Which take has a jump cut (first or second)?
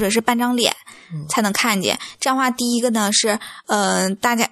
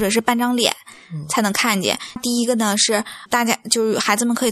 second